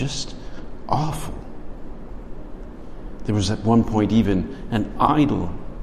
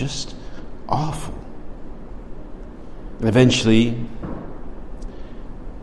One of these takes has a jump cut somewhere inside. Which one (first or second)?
second